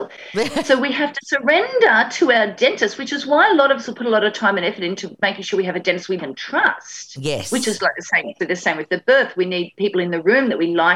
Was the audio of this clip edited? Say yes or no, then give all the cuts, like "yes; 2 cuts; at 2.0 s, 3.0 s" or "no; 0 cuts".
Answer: yes; 2 cuts; at 6.2 s, 8.4 s